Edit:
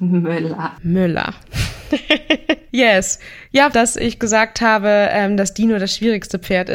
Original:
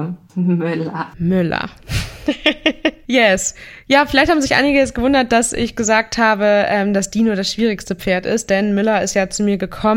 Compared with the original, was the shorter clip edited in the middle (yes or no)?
yes